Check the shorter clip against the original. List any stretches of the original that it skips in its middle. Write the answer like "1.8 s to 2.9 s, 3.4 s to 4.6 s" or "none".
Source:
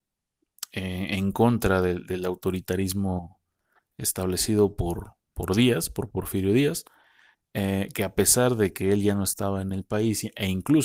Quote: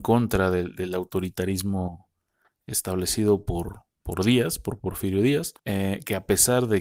6.9 s to 7.5 s